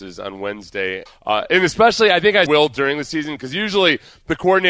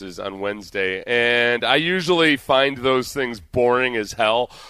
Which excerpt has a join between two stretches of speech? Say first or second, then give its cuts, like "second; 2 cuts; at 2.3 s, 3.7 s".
first; 2 cuts; at 1.1 s, 2.5 s